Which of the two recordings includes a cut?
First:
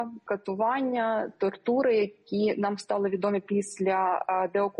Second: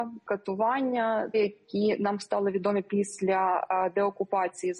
second; 1 cut; at 1.3 s

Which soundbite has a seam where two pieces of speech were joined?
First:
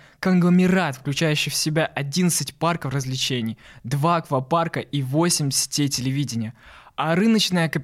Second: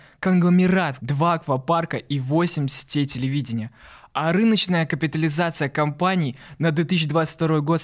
second; 1 cut; at 1.0 s

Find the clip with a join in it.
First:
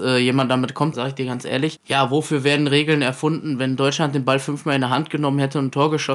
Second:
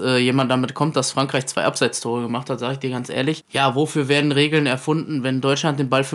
first; 1 cut; at 0.9 s

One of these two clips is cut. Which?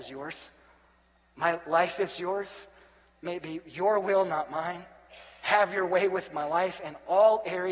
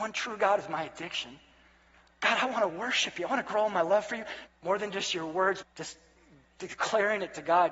second; 2 cuts; at 4.5 s, 5.6 s

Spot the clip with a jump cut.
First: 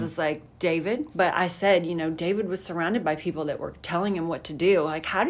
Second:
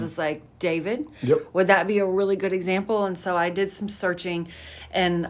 first; 1 cut; at 1.1 s

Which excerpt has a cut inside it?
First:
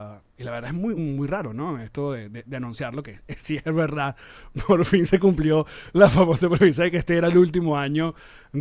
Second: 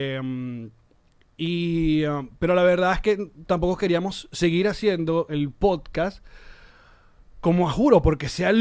first; 2 cuts; at 1.0 s, 3.0 s

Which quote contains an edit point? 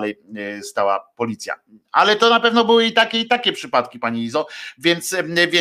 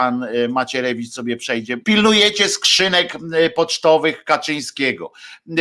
second; 1 cut; at 1.8 s

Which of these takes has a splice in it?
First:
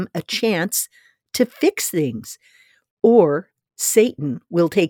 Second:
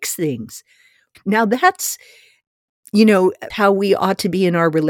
second; 2 cuts; at 1.1 s, 3.5 s

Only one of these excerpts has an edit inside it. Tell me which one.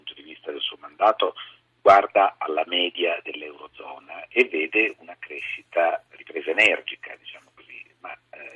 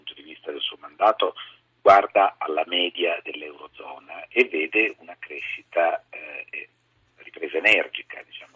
first; 1 cut; at 6.1 s

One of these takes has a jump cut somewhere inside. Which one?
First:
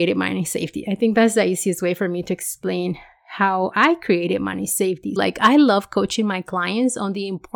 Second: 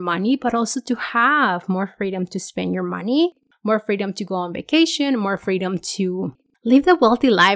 first; 1 cut; at 5.2 s

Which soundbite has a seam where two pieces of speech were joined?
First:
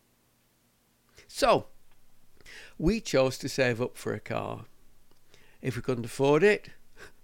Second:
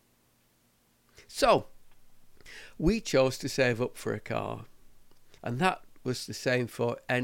second; 1 cut; at 5.4 s

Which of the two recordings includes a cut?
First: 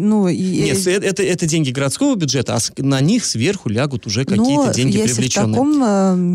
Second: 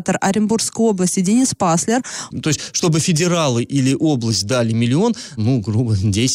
second; 2 cuts; at 2.3 s, 5.4 s

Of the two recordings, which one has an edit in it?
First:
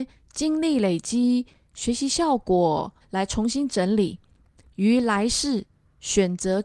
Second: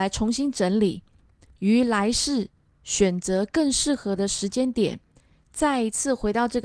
first; 1 cut; at 3.0 s

